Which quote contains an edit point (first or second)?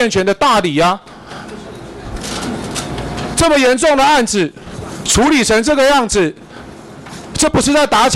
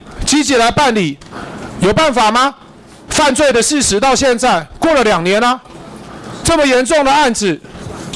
second